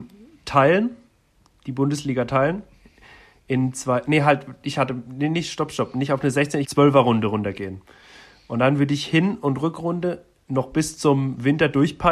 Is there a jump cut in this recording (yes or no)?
yes